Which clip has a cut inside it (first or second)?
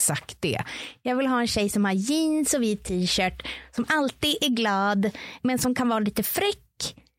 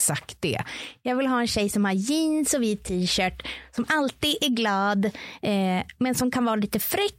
first